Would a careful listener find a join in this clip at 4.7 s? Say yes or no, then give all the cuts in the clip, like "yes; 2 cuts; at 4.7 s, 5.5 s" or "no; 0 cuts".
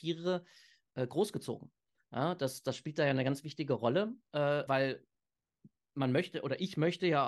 yes; 1 cut; at 4.7 s